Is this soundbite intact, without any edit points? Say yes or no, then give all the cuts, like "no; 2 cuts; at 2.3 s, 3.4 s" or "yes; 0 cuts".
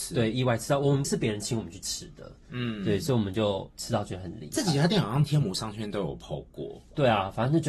no; 1 cut; at 1.0 s